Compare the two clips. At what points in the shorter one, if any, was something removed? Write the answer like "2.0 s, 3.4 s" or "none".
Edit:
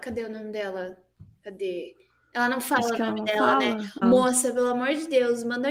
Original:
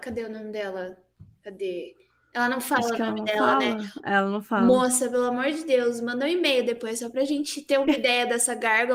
4.0 s